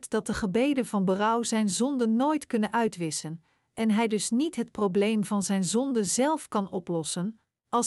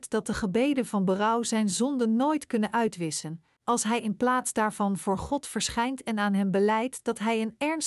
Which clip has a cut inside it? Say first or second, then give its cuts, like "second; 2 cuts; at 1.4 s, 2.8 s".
second; 1 cut; at 3.6 s